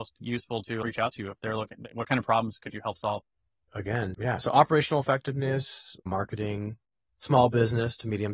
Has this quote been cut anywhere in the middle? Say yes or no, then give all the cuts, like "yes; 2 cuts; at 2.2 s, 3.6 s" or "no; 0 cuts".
yes; 2 cuts; at 3.7 s, 6.0 s